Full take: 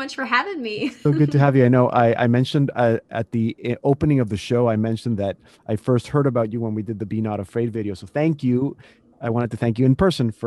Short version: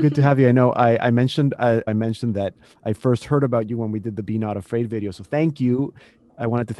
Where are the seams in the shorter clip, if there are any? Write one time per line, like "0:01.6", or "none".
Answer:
0:01.9